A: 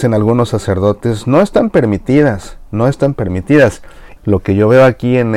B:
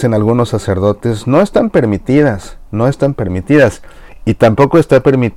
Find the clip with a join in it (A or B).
A